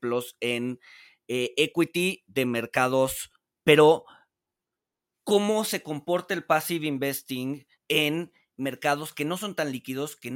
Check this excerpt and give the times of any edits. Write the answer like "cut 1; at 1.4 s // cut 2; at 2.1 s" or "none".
cut 1; at 3.6 s // cut 2; at 7.8 s